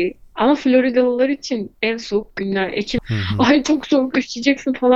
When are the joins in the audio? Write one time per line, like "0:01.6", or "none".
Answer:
0:01.7
0:03.0